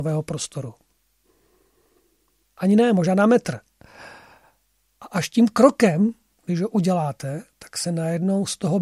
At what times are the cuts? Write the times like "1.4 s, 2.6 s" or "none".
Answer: 2.4 s